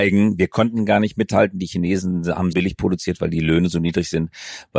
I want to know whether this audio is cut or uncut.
cut